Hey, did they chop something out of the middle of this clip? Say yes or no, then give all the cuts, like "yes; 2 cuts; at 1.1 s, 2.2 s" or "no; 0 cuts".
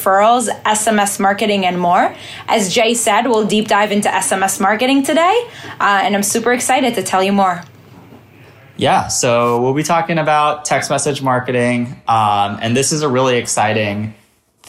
no; 0 cuts